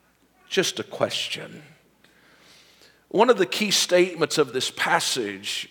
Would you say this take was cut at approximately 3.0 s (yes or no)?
no